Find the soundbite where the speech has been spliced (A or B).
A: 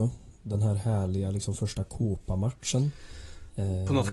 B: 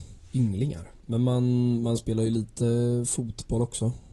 B